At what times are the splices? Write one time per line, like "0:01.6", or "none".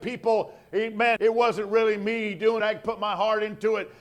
0:01.2
0:02.6